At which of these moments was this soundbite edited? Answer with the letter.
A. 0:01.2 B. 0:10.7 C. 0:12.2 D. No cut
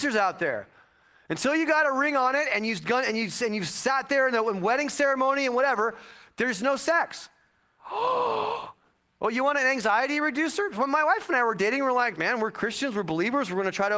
C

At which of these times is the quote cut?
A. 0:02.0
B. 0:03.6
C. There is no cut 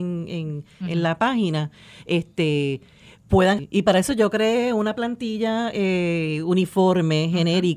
B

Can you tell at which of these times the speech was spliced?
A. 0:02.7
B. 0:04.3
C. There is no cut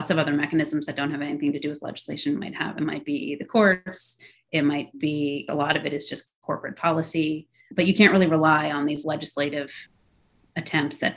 C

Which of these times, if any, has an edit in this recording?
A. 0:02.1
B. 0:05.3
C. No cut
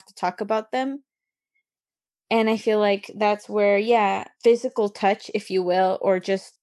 C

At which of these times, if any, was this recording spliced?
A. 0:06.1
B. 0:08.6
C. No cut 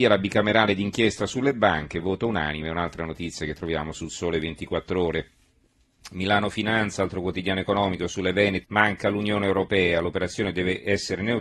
B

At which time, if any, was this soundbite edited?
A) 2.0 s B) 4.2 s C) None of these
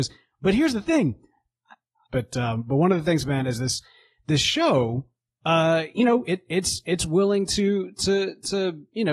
A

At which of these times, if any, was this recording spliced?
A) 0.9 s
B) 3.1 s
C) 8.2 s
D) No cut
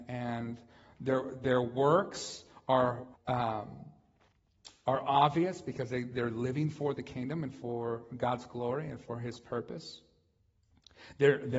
B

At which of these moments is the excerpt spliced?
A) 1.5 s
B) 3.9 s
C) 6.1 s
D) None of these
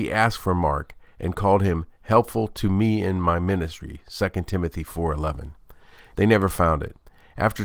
C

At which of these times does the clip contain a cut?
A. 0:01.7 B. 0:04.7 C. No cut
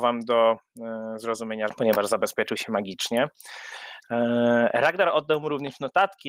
A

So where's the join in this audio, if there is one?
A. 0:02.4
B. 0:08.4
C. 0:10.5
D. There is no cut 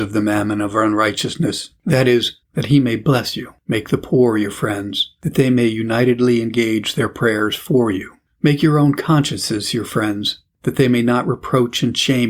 A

